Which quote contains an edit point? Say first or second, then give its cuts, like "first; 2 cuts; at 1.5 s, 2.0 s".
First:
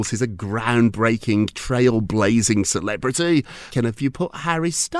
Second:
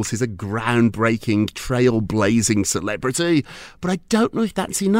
first; 1 cut; at 3.7 s